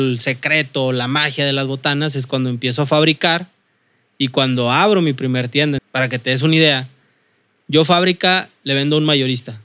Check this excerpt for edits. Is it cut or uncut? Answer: cut